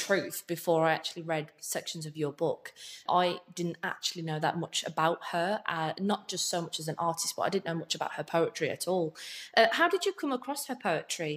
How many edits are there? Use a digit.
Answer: 1